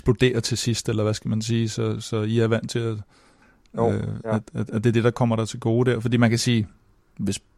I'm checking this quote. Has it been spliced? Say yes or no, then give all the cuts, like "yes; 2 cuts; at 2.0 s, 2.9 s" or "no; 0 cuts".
no; 0 cuts